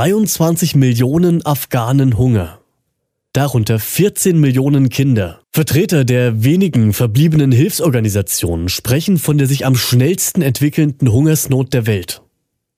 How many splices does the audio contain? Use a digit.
1